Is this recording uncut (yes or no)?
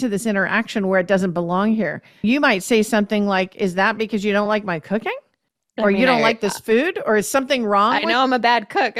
yes